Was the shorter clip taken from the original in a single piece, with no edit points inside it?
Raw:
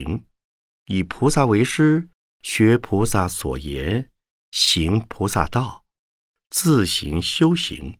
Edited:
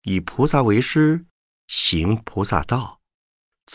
no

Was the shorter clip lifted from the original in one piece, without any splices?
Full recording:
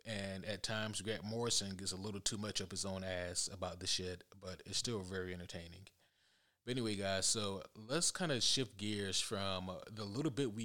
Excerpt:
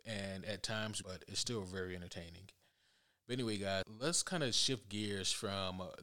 no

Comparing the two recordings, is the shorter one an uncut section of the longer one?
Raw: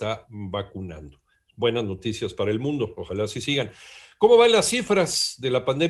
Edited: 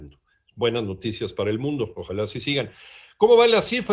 yes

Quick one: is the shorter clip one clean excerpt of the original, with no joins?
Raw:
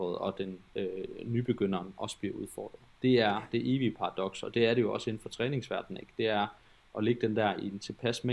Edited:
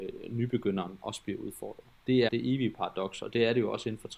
no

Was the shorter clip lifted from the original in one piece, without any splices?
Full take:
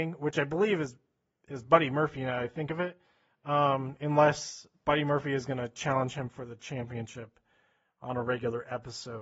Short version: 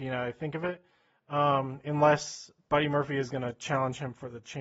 yes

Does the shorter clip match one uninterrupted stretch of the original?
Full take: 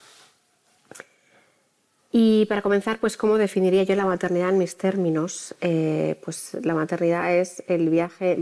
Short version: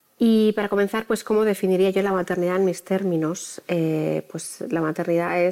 yes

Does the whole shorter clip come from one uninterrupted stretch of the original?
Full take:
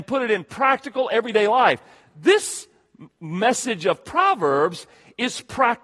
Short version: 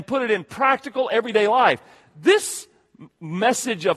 yes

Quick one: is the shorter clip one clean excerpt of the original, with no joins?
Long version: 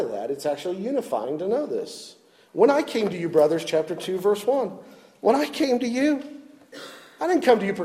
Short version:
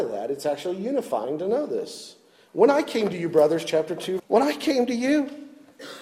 no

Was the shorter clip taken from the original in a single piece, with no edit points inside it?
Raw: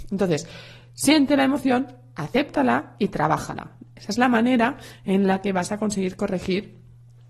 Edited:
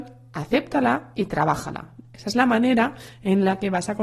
yes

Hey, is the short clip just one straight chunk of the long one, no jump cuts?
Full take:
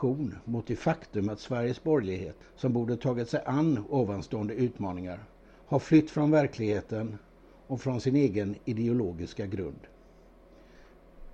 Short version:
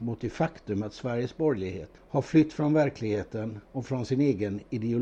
no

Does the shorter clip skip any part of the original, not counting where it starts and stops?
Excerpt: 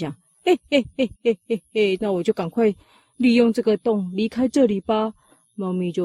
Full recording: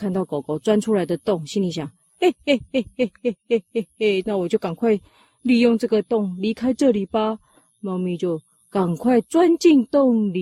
yes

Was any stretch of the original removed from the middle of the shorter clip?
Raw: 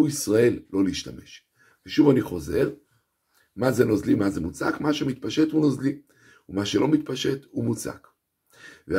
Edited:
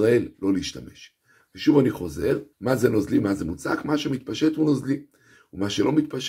yes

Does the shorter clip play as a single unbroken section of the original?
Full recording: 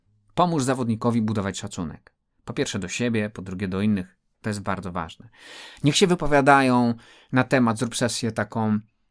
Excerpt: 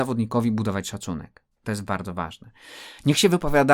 no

